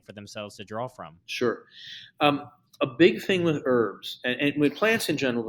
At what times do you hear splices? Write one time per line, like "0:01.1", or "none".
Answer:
0:01.2